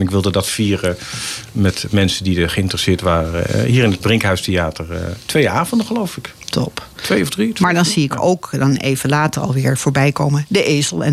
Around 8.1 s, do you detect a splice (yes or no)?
no